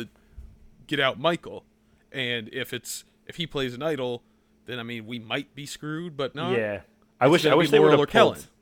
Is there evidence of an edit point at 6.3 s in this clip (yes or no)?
yes